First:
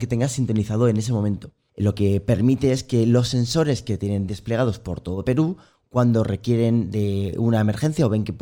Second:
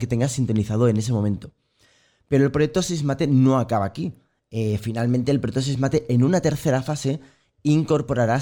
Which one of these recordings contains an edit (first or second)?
first